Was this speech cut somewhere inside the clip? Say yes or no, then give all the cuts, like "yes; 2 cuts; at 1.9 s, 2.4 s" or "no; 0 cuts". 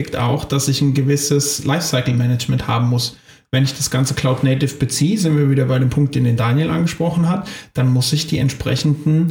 no; 0 cuts